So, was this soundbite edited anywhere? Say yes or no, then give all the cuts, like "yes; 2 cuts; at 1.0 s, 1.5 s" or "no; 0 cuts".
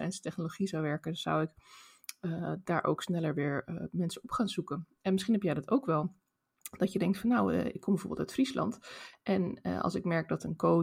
no; 0 cuts